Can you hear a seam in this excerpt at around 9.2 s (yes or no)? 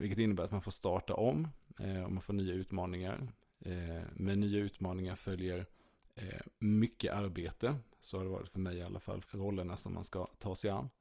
yes